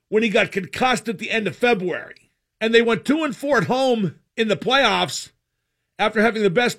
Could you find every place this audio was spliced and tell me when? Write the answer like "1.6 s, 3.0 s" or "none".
2.5 s, 4.3 s